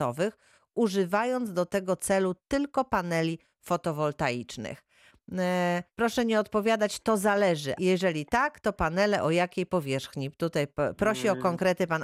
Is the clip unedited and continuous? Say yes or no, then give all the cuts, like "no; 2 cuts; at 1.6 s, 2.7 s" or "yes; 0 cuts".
no; 2 cuts; at 5.9 s, 7.8 s